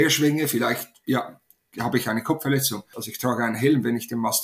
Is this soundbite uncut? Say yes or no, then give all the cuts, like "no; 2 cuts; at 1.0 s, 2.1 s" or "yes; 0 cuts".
no; 1 cut; at 2.9 s